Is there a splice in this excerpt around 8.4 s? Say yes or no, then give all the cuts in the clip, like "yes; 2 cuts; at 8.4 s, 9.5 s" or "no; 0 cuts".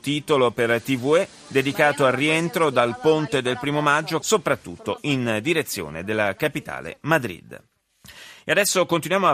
no; 1 cut; at 4.2 s